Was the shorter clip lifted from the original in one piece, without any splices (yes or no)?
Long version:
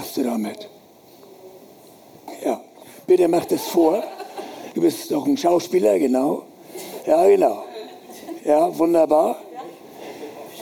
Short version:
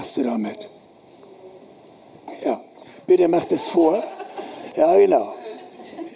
no